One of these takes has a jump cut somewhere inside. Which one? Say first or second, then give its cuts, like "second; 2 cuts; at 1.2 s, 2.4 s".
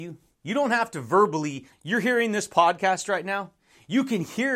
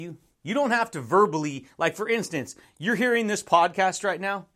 first; 1 cut; at 1.7 s